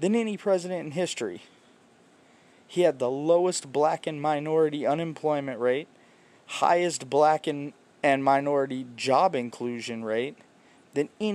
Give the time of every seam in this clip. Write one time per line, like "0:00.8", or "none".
none